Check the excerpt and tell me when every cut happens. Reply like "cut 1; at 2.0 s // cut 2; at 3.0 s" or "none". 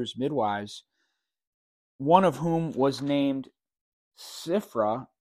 none